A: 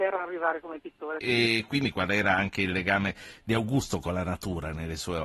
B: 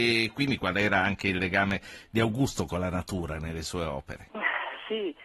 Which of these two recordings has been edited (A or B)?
A